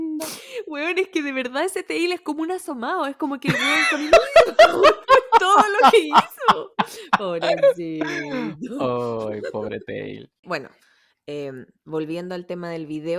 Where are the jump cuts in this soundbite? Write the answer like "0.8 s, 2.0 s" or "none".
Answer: none